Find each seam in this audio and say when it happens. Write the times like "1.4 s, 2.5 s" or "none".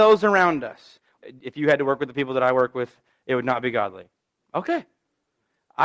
1.2 s